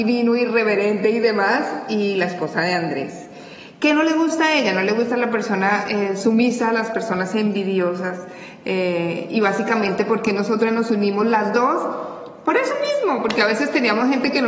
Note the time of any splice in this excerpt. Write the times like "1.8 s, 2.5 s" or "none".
none